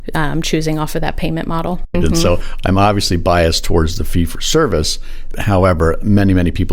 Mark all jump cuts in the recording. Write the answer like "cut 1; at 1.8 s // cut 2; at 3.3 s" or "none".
cut 1; at 1.9 s // cut 2; at 5.3 s